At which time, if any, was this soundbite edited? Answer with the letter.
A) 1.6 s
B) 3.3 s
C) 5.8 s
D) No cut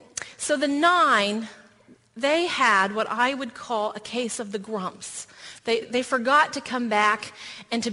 C